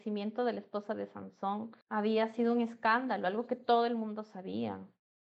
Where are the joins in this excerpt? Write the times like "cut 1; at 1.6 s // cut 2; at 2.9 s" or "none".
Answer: cut 1; at 1.8 s

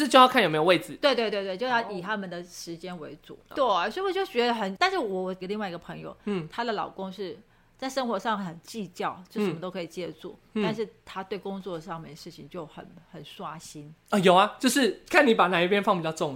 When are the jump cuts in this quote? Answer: cut 1; at 3.5 s

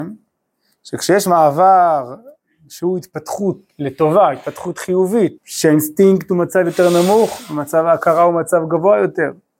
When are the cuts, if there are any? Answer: cut 1; at 5.4 s

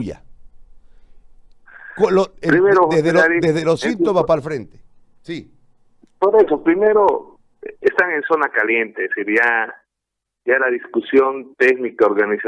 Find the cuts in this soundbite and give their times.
none

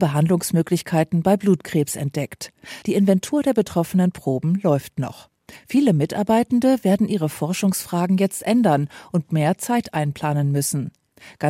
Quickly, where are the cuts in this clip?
cut 1; at 2.8 s

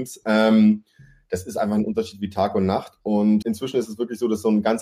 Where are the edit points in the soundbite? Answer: cut 1; at 3.4 s

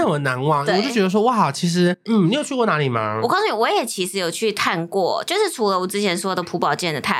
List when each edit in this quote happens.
cut 1; at 2.1 s

